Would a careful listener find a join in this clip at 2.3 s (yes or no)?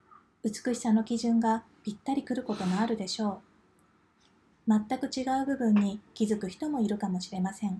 no